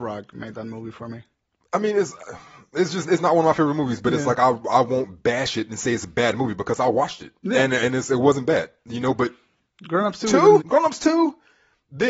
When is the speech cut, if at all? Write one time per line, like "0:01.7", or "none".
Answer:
0:10.6

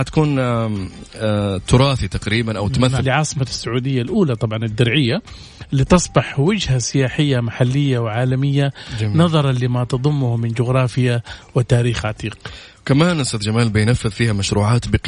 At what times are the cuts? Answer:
0:03.0

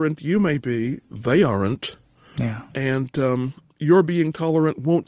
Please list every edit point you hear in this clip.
none

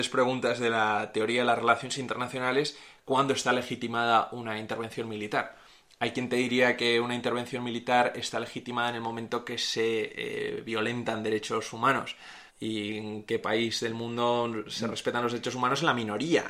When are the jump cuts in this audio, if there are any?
0:12.5

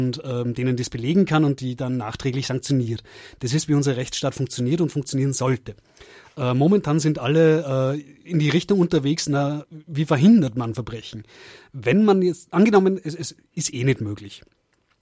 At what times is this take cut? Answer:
none

